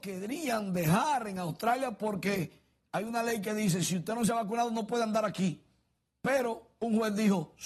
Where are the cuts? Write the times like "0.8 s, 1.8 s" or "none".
none

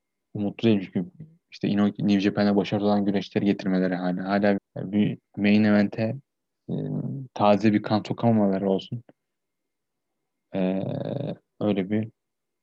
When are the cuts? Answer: 4.6 s

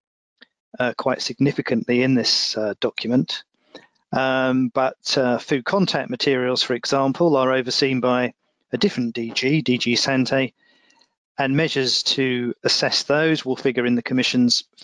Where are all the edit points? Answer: 12.6 s

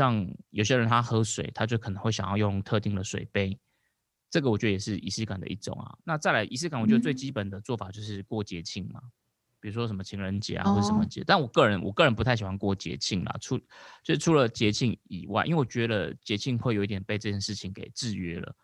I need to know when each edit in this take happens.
6.0 s

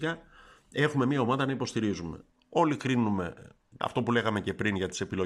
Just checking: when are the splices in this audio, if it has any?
2.3 s, 3.8 s

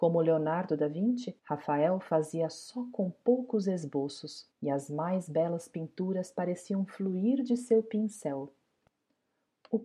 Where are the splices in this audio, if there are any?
1.4 s, 4.5 s

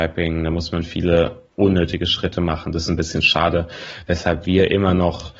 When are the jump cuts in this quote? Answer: 1.5 s

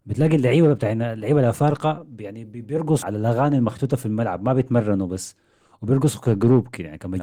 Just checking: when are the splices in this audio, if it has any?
3.0 s

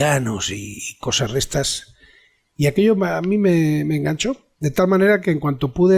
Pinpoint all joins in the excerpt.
none

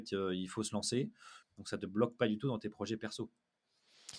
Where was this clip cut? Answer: 1.4 s

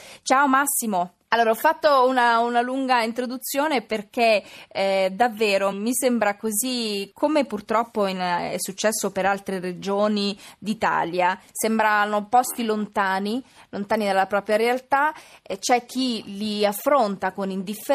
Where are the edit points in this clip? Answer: 1.3 s, 5.7 s, 11.5 s

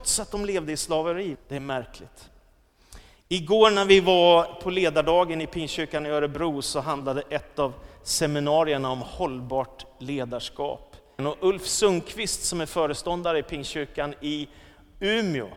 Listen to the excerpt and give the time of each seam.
1.3 s, 11.2 s

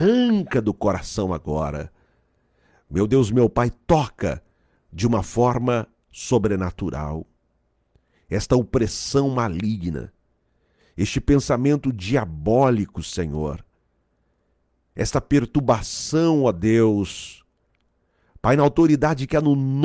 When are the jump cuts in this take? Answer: none

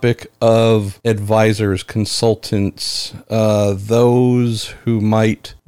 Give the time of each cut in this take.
none

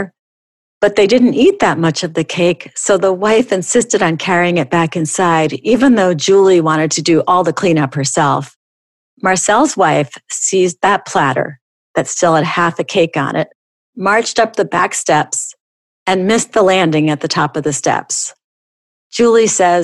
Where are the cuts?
none

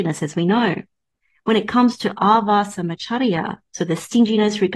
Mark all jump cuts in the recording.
none

